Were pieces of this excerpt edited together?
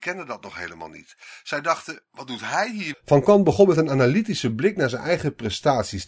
yes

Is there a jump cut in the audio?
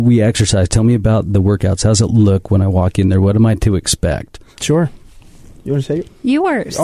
no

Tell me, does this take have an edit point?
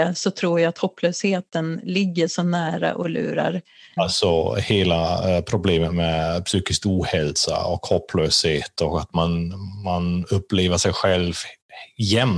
yes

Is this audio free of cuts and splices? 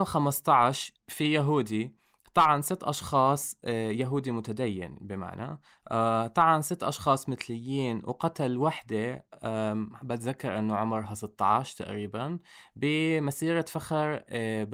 yes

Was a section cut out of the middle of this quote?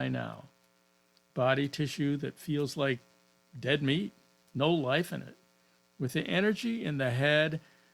yes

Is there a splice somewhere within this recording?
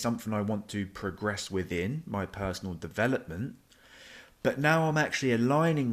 no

